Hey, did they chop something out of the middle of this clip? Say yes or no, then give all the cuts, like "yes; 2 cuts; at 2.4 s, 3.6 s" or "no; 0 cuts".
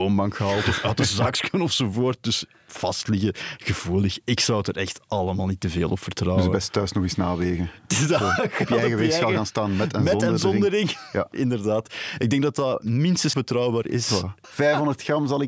yes; 2 cuts; at 13.3 s, 14.4 s